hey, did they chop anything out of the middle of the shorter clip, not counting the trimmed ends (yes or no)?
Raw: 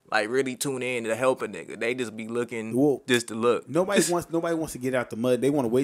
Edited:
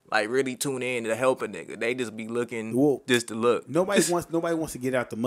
no